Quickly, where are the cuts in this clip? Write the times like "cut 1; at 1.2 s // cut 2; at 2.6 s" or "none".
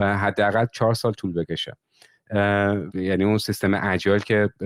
cut 1; at 2.9 s